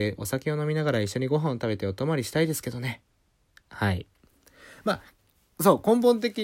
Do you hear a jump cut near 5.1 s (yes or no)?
no